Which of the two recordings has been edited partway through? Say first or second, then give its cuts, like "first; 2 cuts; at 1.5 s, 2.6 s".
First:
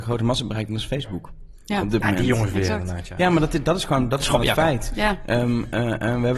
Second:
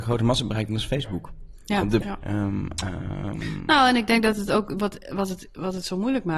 second; 1 cut; at 2.0 s